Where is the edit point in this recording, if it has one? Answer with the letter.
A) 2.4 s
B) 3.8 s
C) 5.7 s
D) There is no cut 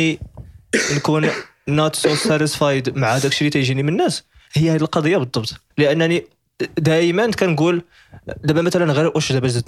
C